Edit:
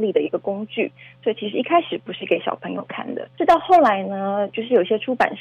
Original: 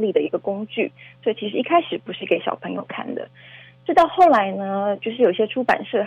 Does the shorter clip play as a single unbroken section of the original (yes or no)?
no